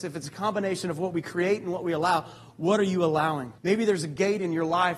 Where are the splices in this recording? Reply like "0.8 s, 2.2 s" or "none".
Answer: 3.6 s